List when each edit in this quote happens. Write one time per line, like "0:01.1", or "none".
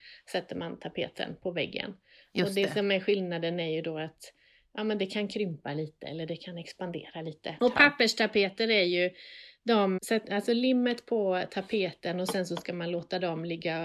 0:07.6
0:10.0